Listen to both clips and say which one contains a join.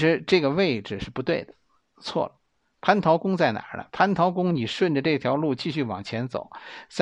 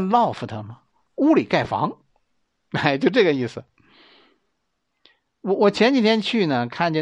second; 1 cut; at 1.1 s

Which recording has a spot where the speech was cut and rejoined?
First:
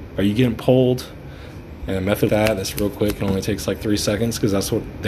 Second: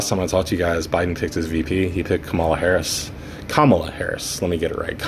first; 1 cut; at 2.3 s

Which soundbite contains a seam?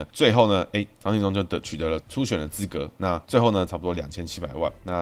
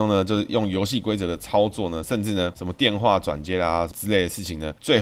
first; 1 cut; at 3.7 s

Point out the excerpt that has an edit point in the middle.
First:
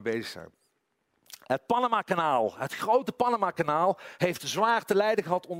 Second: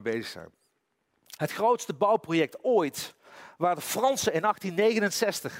second; 1 cut; at 1.4 s

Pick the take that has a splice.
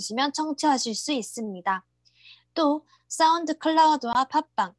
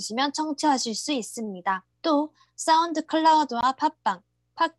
second; 1 cut; at 1.9 s

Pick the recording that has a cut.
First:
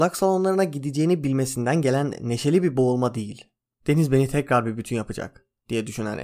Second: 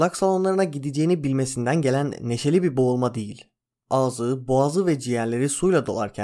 first; 1 cut; at 3.8 s

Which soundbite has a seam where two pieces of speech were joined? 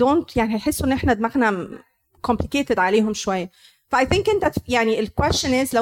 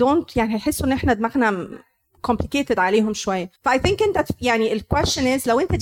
second; 1 cut; at 3.6 s

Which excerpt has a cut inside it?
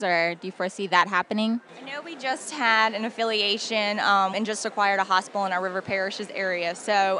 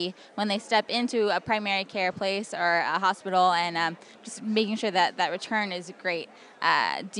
first; 1 cut; at 4.3 s

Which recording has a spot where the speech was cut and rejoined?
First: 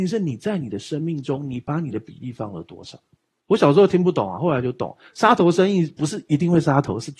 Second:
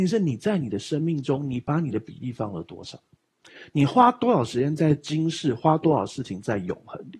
first; 1 cut; at 3.4 s

